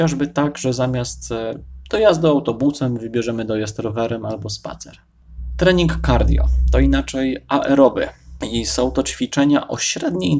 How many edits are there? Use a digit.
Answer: 0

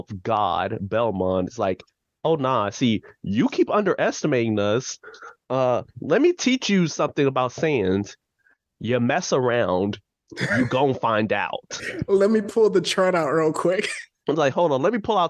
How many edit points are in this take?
0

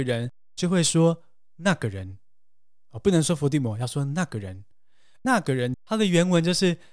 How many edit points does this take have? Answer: 0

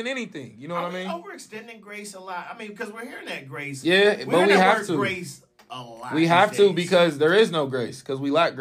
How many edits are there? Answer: 0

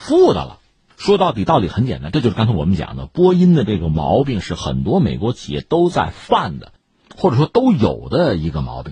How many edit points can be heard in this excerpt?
0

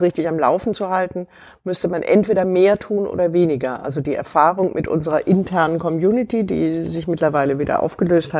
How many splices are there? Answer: 0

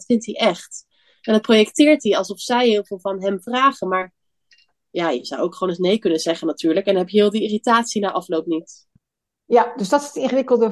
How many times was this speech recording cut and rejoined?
0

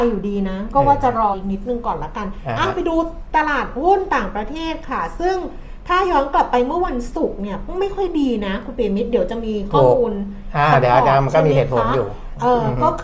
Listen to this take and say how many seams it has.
1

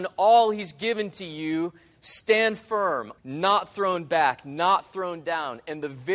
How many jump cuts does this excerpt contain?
1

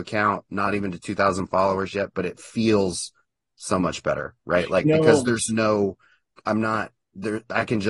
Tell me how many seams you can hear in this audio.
0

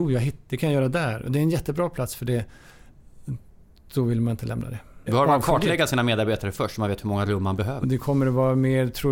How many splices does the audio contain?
2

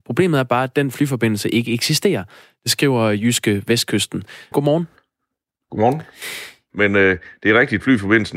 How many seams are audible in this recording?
2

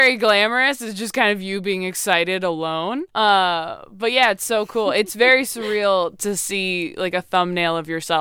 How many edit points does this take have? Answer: 1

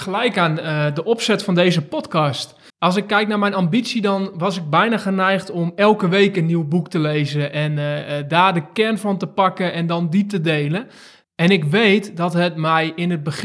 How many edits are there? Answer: 2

